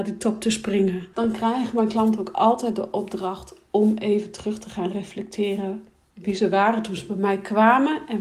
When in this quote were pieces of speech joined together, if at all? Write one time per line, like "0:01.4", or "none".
0:01.1